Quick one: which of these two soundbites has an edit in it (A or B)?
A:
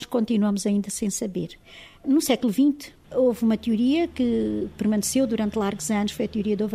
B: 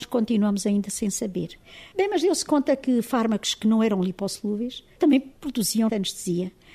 B